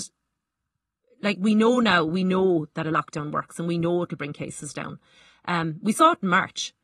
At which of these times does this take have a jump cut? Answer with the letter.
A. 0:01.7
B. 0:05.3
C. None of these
C